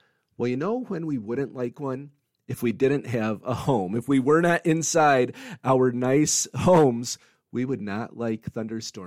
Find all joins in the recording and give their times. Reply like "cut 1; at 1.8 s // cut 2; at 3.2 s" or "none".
none